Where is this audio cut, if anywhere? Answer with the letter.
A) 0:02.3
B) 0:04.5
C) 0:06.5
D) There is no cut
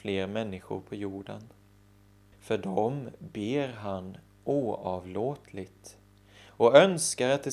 A